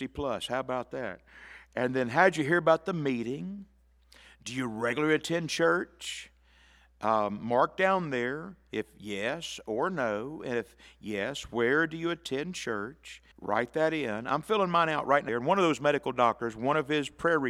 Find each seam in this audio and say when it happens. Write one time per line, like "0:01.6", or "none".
0:13.3
0:15.3